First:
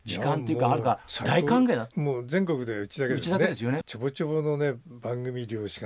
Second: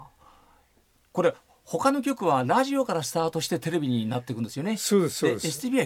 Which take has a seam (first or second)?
first